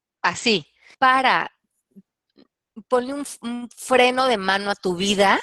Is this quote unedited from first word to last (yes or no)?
no